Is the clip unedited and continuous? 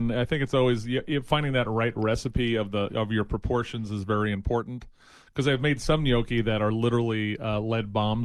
yes; 0 cuts

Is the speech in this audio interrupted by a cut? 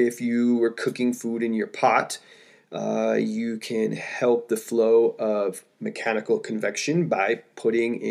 no; 0 cuts

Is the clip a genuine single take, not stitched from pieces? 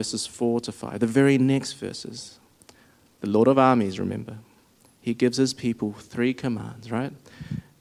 yes; 0 cuts

